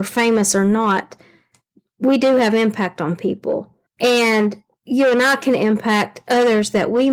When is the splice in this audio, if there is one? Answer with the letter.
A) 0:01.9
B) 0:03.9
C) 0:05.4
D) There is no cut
B